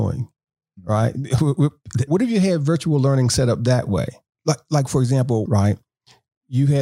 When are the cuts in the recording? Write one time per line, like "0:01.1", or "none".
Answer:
0:02.1
0:04.4
0:05.5